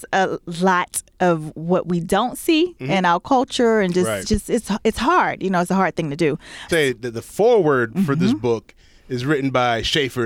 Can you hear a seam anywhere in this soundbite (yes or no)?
yes